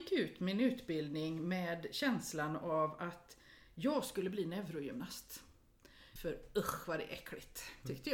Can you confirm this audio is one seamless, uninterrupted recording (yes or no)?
no